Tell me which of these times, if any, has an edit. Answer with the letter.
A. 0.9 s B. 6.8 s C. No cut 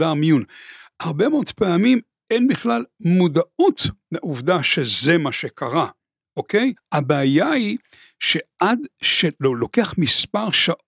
B